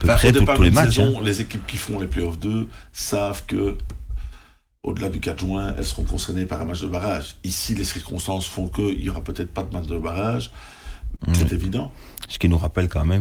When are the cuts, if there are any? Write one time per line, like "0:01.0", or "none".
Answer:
0:11.2